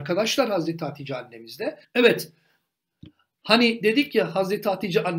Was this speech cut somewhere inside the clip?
yes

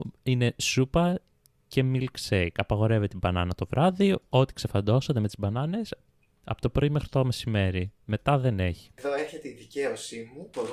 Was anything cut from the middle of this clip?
yes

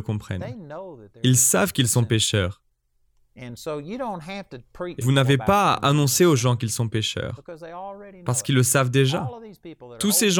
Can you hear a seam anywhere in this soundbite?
yes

